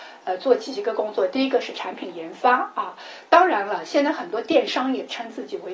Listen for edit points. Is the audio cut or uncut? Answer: uncut